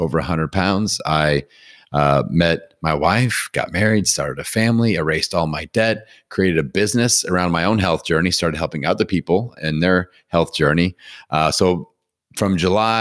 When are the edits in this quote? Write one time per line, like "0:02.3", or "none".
none

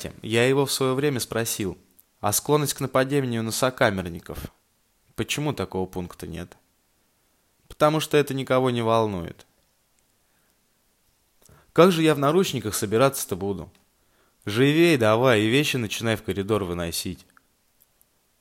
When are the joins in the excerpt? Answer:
none

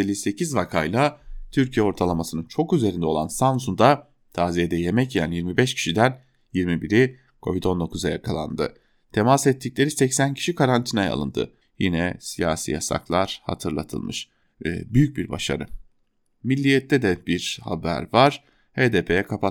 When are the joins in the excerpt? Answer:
0:11.6
0:14.4

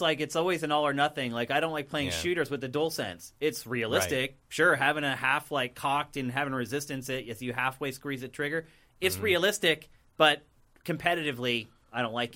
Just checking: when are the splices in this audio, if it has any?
none

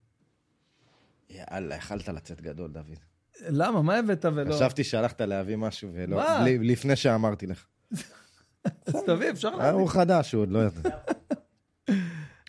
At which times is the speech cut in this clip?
none

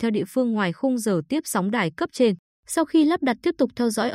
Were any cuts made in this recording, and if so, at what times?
0:02.5

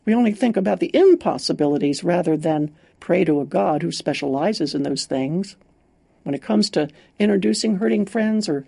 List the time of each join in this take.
none

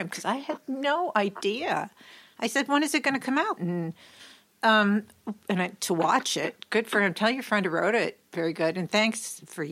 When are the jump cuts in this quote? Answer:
0:03.6

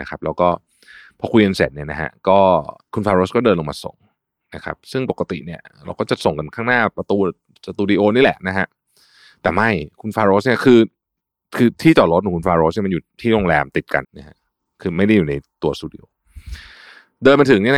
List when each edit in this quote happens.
0:14.0

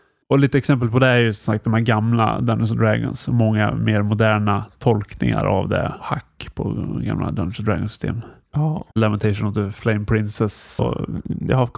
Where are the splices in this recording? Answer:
0:08.9
0:10.8

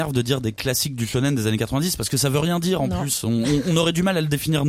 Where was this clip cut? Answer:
none

